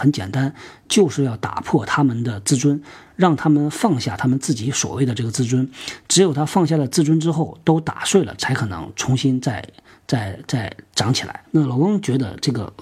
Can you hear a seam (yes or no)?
yes